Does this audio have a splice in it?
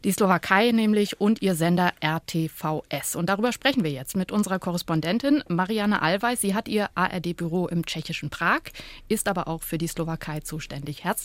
no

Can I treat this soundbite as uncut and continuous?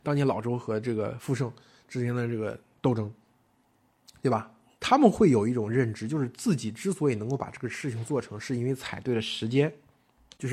no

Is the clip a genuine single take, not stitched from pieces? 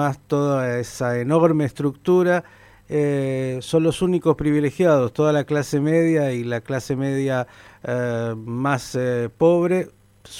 yes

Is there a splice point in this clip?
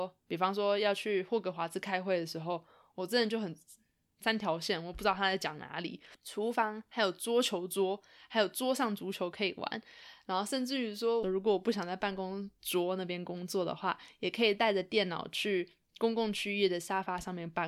yes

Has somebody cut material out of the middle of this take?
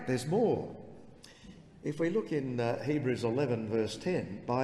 no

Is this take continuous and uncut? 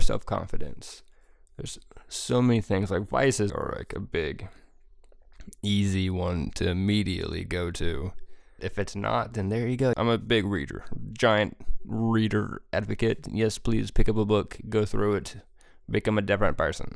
no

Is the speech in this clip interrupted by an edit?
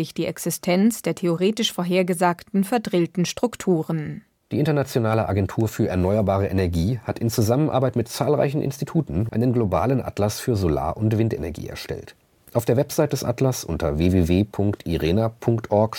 yes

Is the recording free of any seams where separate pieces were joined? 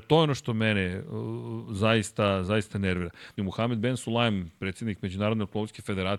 no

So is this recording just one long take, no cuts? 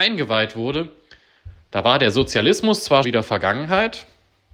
no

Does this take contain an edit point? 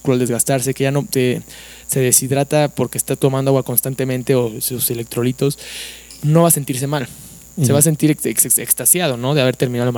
no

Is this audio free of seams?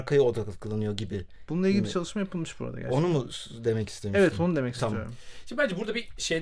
yes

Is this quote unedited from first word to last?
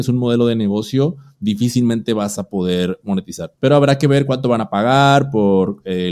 no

